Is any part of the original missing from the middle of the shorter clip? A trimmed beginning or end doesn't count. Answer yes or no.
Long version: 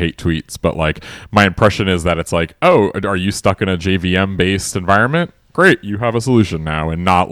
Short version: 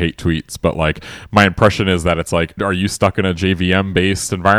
yes